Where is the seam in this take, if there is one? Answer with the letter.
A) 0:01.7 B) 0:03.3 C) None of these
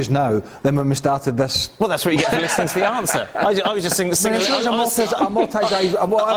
C